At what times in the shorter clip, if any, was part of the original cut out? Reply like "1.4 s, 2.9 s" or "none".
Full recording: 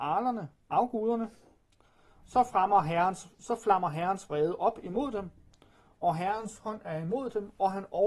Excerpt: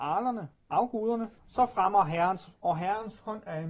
1.4 s, 2.5 s